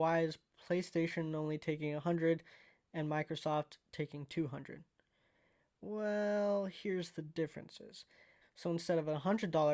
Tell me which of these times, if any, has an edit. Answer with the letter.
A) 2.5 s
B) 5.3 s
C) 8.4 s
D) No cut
C